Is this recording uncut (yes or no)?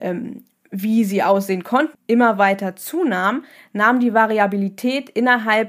no